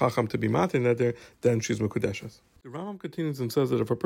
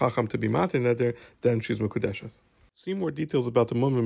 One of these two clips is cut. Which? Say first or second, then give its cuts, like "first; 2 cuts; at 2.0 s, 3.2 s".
first; 1 cut; at 2.6 s